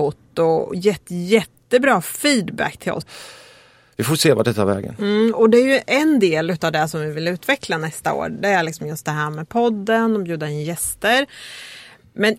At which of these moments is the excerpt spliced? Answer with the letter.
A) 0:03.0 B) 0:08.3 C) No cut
A